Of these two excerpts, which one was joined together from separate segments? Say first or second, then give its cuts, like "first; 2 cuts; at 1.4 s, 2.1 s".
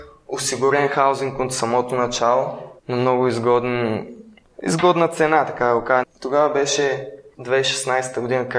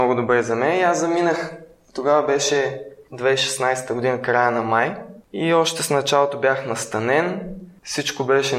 first; 2 cuts; at 2.8 s, 6.0 s